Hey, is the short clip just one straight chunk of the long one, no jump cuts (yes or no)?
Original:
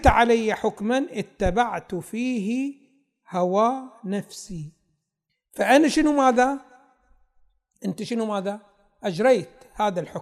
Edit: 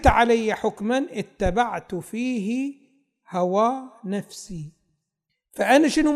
yes